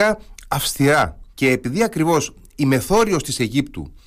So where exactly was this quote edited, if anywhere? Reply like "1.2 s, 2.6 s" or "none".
1.3 s